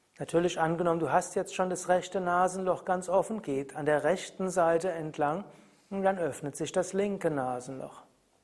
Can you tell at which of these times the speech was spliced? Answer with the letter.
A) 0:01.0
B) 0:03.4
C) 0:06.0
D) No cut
B